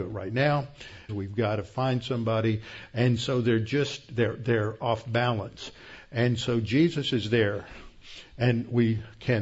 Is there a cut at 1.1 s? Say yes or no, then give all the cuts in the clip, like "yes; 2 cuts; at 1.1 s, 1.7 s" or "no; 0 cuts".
yes; 1 cut; at 1.1 s